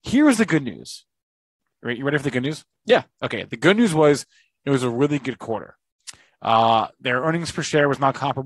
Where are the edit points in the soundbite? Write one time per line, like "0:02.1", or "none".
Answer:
none